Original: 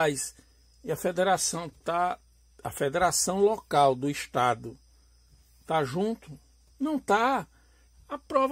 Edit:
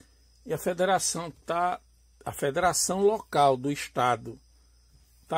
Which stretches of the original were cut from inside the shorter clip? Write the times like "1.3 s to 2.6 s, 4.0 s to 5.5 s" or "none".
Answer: none

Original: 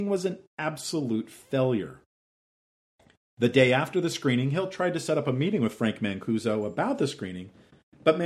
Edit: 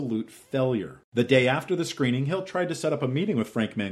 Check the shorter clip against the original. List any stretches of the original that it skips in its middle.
2.0 s to 3.3 s

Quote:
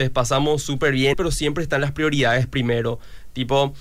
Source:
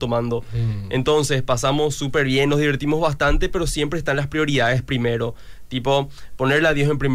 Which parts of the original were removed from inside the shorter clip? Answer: 2.5 s to 3.5 s

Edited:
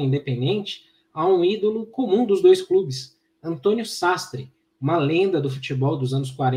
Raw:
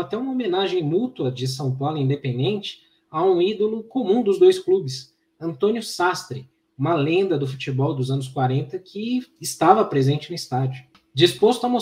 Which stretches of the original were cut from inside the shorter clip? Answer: none

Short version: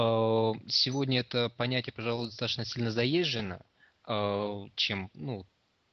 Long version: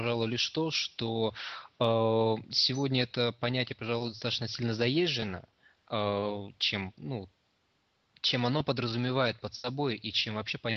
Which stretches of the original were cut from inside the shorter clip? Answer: none

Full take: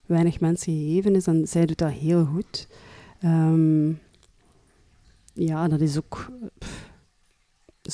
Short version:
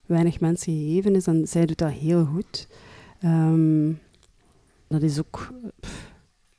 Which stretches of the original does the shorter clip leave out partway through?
4.9 s to 5.7 s

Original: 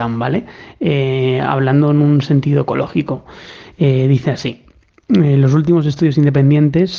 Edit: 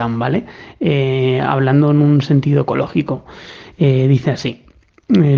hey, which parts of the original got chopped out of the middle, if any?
none

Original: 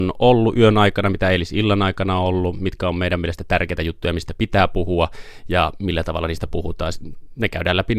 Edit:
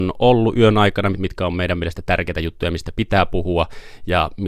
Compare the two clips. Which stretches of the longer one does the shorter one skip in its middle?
1.1 s to 2.5 s

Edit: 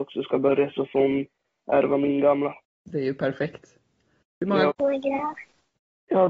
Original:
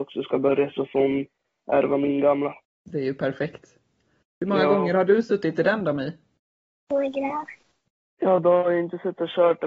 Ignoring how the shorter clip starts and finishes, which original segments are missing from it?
4.7 s to 6.8 s

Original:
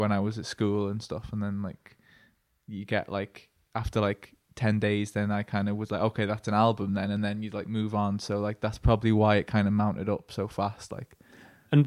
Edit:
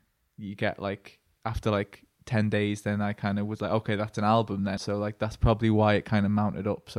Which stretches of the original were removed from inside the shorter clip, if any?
7.1 s to 8.2 s

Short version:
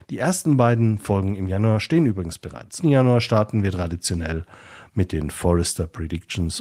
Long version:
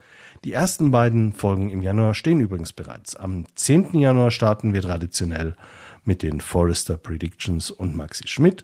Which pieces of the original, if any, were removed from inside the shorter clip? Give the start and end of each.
3.1 s to 3.9 s

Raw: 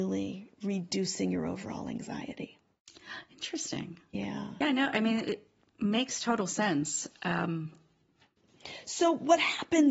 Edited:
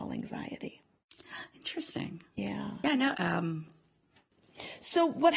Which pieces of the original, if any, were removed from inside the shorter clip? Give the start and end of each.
4.9 s to 7.2 s

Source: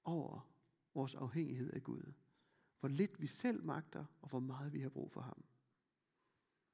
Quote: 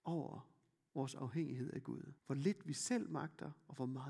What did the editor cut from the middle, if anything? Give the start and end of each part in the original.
2.2 s to 2.7 s

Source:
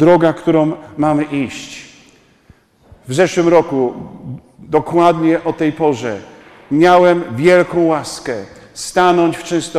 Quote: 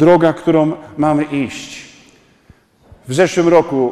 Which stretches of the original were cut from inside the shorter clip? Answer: none

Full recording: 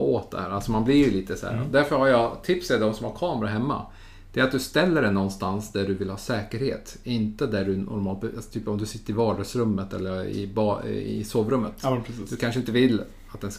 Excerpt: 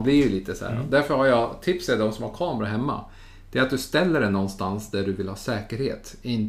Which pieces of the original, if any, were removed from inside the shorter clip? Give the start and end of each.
none

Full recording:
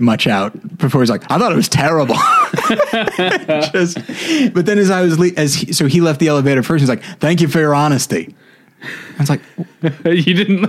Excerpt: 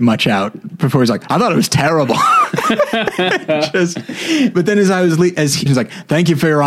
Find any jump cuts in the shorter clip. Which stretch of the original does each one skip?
5.7 s to 6.8 s

